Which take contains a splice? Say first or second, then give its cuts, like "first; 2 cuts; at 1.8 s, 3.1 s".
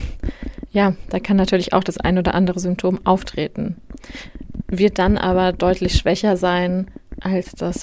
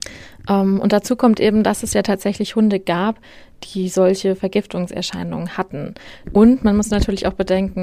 second; 1 cut; at 6.2 s